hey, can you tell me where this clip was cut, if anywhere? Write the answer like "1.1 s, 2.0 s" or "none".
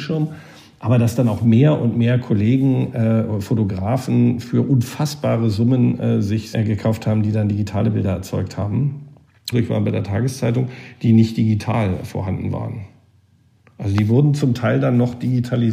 6.5 s, 9.5 s